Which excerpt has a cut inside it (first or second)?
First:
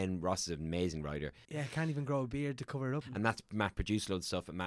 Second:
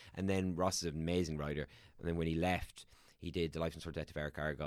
first